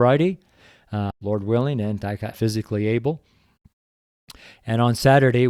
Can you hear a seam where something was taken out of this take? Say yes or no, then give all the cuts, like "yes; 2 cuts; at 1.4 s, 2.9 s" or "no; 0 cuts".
yes; 2 cuts; at 1.1 s, 2.3 s